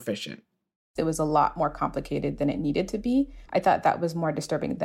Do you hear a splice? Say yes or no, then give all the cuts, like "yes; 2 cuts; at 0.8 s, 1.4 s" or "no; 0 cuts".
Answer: yes; 1 cut; at 3.5 s